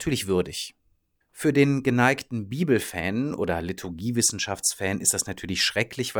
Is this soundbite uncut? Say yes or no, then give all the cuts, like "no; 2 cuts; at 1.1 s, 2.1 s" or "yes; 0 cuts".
no; 1 cut; at 1.2 s